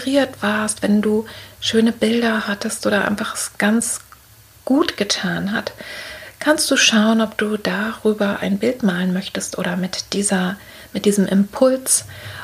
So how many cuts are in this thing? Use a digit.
0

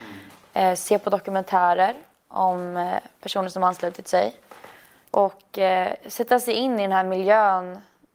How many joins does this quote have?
1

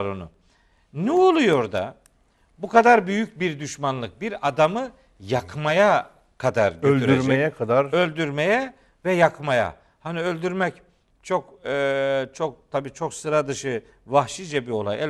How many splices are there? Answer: 0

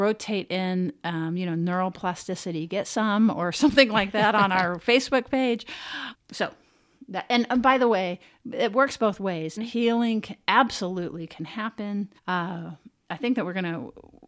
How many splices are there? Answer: 3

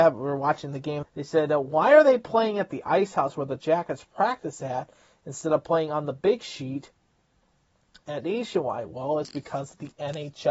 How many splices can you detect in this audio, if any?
1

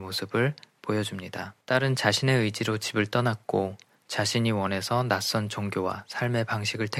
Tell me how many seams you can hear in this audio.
1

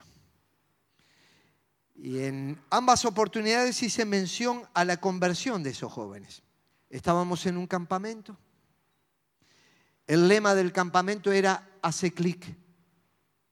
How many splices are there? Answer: 1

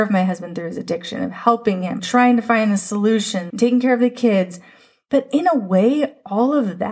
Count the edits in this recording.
2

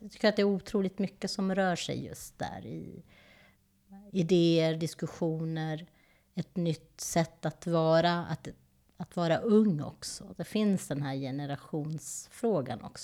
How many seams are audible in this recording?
0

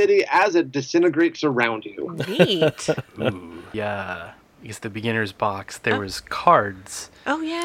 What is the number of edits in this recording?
1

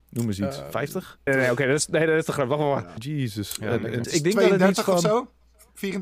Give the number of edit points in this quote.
3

